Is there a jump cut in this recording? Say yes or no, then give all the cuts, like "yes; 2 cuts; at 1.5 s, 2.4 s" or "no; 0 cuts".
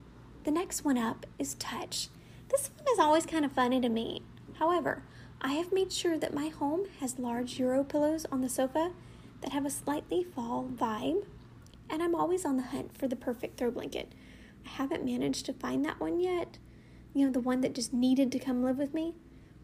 yes; 1 cut; at 4.4 s